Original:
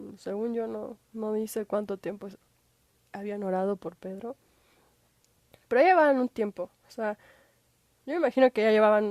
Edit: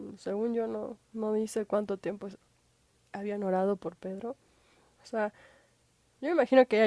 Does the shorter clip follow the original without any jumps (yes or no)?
no